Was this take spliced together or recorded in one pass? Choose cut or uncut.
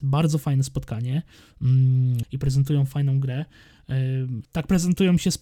cut